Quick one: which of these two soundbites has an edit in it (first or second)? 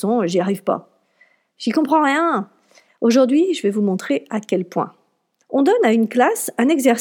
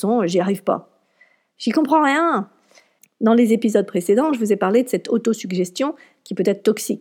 first